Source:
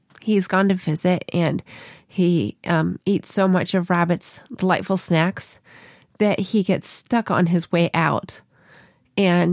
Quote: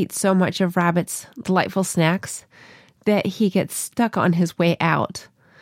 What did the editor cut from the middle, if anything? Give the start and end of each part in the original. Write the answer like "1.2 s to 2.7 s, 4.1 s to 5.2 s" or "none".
none